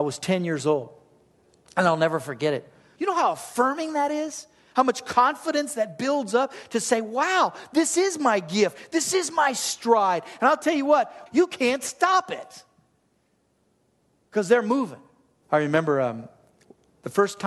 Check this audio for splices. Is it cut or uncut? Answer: cut